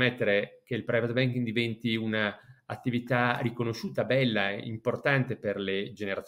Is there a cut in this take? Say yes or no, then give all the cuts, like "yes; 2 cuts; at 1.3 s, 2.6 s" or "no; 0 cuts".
no; 0 cuts